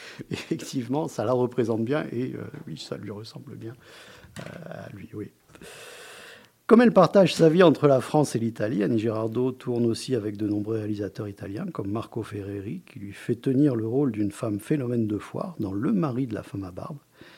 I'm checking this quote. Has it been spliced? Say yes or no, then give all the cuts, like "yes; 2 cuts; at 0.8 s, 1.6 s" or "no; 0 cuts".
no; 0 cuts